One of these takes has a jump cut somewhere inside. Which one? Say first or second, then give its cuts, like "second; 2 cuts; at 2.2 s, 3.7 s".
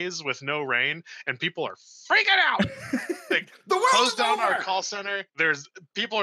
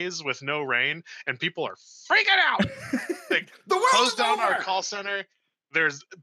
first; 1 cut; at 5.3 s